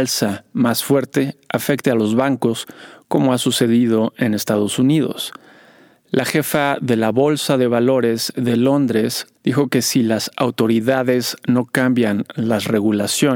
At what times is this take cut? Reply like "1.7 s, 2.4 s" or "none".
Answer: 9.4 s